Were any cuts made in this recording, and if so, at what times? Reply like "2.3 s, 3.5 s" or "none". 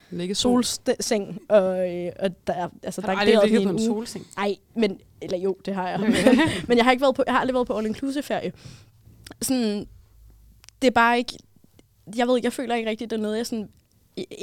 none